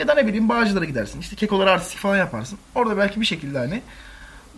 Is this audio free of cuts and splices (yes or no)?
yes